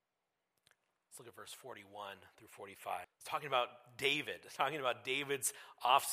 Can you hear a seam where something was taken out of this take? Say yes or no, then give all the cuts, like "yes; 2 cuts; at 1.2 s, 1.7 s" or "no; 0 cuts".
yes; 1 cut; at 3.0 s